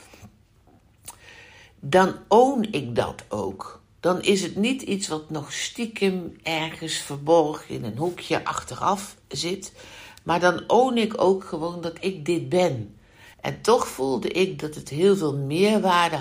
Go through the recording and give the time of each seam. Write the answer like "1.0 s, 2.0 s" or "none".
13.3 s